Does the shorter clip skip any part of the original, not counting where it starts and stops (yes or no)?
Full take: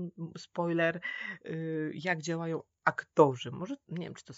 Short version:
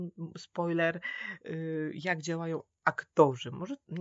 no